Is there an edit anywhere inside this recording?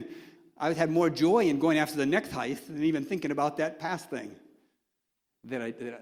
no; 0 cuts

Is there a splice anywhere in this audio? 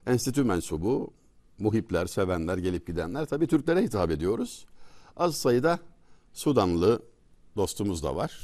no; 0 cuts

